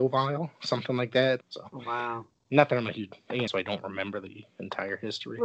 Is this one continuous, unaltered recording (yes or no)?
no